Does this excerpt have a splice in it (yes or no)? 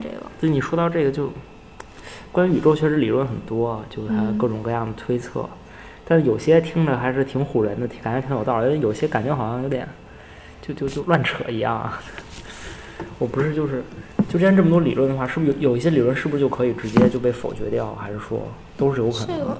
yes